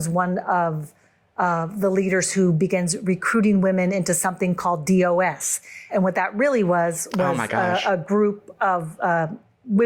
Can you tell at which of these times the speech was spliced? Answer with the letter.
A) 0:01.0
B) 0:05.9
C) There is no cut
B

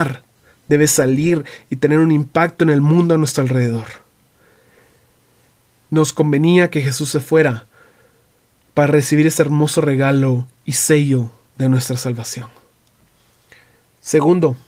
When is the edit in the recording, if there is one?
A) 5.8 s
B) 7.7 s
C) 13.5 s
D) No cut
A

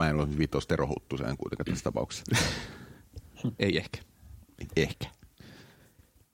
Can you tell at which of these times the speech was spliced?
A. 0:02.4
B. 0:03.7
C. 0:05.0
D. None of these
D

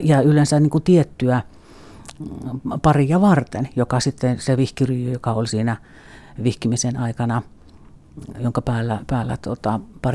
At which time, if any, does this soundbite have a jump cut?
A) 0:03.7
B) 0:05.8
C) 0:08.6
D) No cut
D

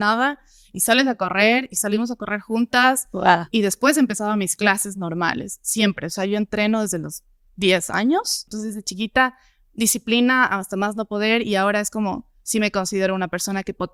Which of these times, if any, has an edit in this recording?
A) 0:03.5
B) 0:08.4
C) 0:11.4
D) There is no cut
D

